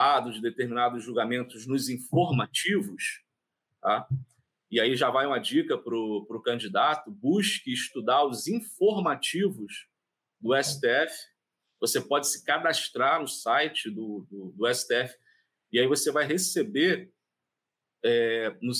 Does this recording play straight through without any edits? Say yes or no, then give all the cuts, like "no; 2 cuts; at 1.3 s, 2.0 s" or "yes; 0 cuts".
yes; 0 cuts